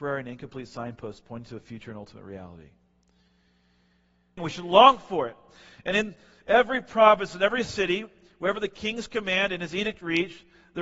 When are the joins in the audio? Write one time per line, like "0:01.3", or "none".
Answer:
0:04.4